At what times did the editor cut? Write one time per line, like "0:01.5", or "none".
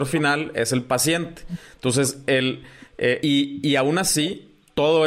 0:03.2

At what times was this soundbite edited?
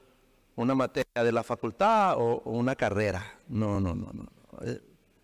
none

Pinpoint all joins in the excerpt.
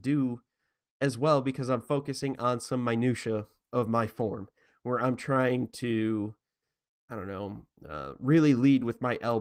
none

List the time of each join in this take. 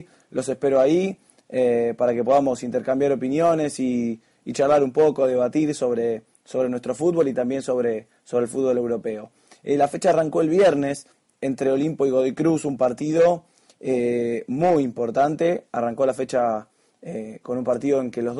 none

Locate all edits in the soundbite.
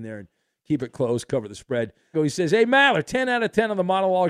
0:02.1

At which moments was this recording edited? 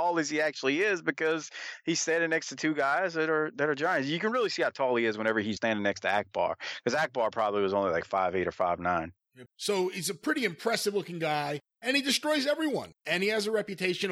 0:05.6
0:09.5

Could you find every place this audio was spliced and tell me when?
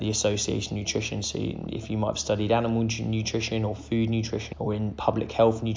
0:04.5

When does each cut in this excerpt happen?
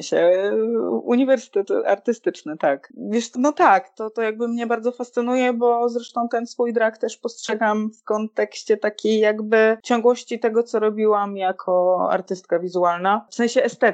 0:03.3

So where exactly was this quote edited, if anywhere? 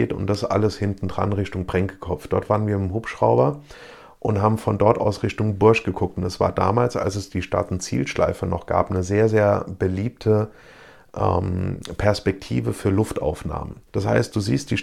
0:13.9

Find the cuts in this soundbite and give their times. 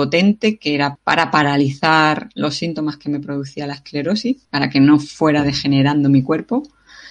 0:01.0
0:04.4

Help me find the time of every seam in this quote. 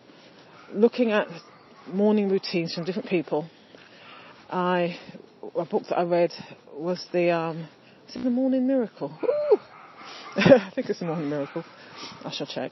none

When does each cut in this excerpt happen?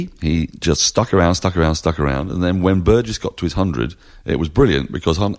none

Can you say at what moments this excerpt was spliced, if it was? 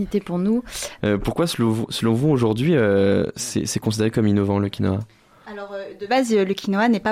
0:01.0

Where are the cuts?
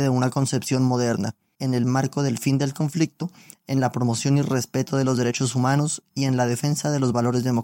0:01.5
0:03.5

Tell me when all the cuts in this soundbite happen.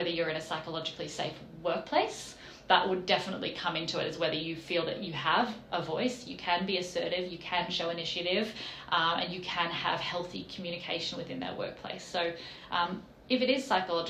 none

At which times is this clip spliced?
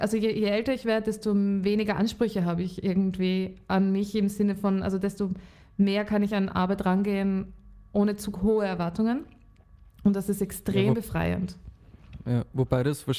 none

